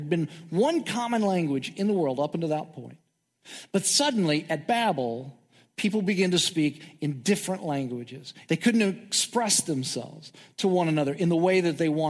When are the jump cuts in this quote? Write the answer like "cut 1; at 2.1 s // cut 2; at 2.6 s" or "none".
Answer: cut 1; at 8.4 s